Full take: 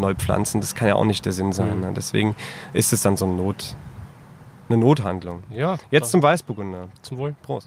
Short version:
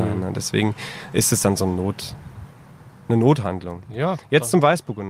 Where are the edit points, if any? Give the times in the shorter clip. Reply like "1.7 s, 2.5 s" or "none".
none